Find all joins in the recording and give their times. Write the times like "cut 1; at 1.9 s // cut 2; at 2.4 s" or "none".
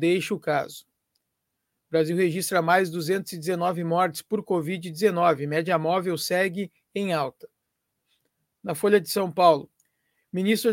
none